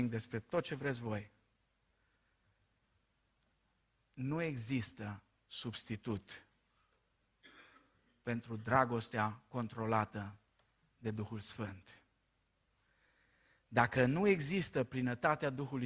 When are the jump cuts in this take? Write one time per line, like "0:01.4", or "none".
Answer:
none